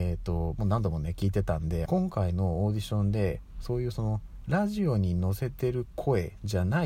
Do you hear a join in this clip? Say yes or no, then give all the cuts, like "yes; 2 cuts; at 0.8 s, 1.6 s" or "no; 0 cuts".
yes; 1 cut; at 1.9 s